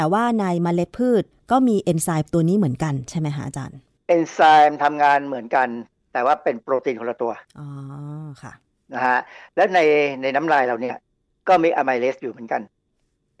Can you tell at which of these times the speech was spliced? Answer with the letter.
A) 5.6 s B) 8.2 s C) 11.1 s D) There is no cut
D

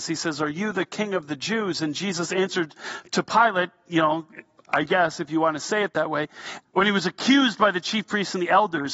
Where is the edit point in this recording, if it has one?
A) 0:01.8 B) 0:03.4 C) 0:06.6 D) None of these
C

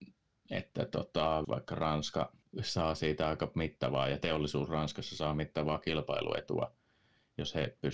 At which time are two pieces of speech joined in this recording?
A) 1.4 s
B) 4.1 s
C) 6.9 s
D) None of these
A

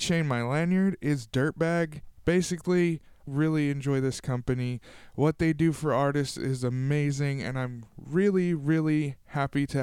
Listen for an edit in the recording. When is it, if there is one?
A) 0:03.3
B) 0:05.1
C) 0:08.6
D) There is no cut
A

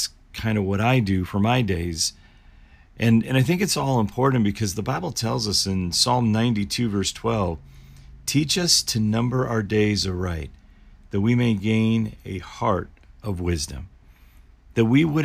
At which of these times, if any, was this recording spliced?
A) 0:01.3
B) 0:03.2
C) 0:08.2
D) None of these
A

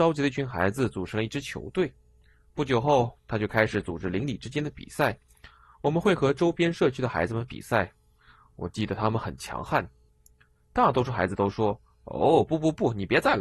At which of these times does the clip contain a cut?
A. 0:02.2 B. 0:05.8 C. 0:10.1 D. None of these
C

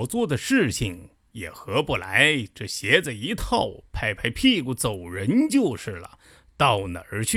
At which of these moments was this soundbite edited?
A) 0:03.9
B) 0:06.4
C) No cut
C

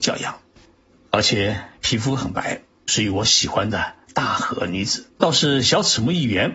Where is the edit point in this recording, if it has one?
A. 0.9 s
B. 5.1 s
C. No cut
B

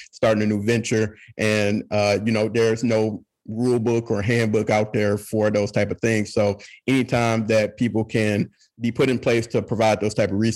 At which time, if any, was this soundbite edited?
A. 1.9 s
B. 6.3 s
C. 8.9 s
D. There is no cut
D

